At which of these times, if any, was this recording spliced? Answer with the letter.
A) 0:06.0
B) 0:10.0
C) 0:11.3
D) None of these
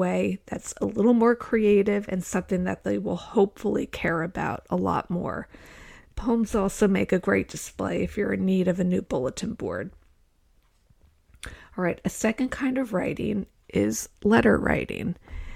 D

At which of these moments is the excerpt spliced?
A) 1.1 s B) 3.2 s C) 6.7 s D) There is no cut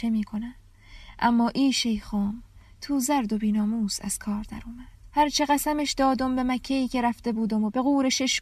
D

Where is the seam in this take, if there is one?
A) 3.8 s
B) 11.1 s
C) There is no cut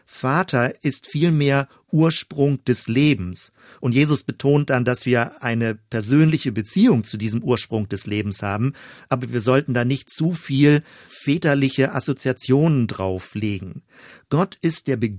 B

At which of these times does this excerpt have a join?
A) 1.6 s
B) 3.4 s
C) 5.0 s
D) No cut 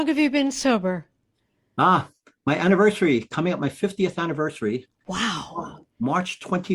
D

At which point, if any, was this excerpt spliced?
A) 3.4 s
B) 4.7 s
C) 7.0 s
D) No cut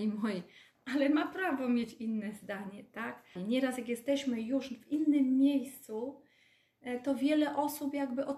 A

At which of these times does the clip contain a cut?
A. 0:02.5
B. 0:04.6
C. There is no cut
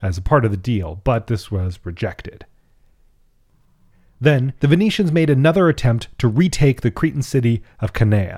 B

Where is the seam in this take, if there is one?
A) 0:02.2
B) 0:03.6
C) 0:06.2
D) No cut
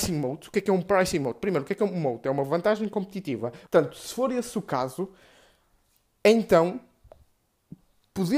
B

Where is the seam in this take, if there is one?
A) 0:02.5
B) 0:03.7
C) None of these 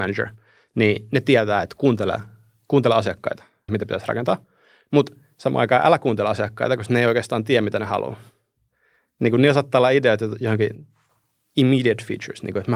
B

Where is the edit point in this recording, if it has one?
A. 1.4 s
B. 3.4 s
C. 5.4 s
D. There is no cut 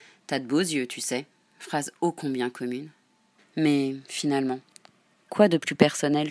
B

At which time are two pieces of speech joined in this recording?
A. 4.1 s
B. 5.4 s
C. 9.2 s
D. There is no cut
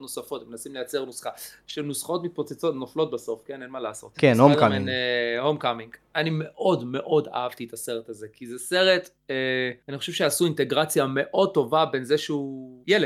A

